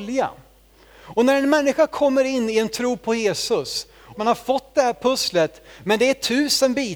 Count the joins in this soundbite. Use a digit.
1